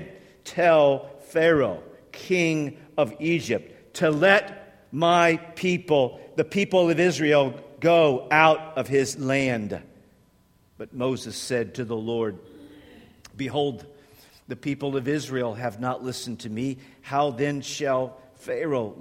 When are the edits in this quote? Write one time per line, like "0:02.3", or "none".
none

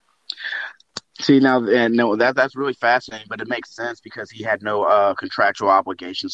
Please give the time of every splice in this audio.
none

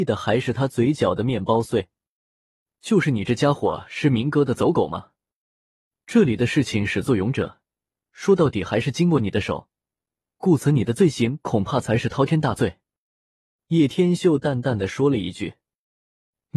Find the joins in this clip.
none

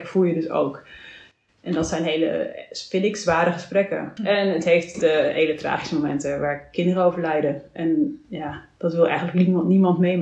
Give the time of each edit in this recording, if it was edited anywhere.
0:04.2

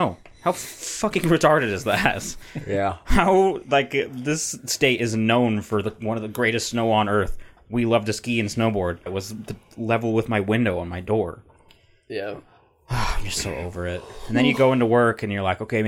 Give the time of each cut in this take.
0:09.1

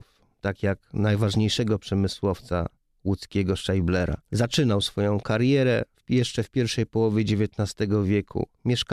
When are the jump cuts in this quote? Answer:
0:04.2

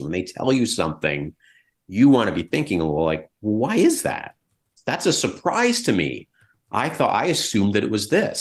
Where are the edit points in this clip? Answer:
none

